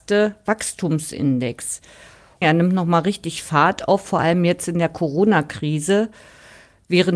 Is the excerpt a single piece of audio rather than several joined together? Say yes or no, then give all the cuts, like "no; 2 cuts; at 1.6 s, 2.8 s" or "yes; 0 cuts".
no; 1 cut; at 2.4 s